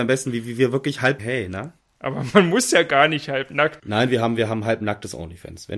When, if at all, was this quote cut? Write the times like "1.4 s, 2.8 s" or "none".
1.2 s, 3.8 s